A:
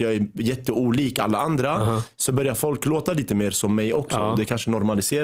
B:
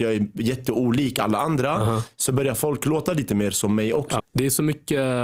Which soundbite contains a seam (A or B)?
B